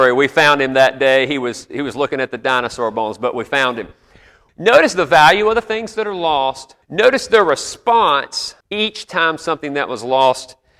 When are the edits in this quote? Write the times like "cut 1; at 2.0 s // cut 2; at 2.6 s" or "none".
cut 1; at 4.5 s // cut 2; at 6.8 s // cut 3; at 8.6 s